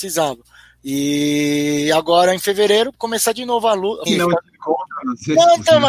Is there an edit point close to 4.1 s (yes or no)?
yes